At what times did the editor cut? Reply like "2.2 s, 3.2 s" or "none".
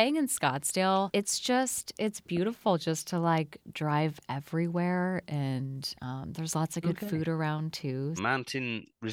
8.2 s